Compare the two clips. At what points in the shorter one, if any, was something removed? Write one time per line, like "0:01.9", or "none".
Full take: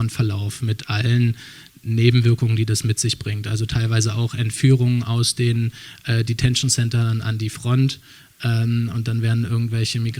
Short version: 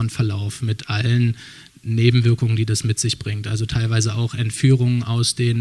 none